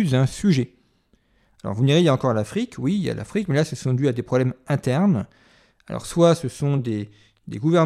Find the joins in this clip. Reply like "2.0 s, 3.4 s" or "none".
none